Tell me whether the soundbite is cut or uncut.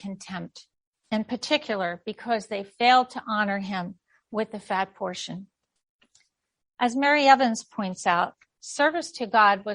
uncut